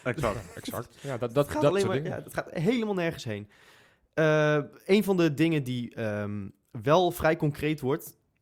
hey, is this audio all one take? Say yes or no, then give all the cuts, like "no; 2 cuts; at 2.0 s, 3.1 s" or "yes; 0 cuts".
yes; 0 cuts